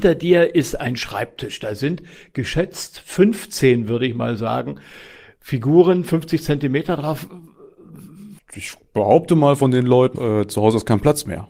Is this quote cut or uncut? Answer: cut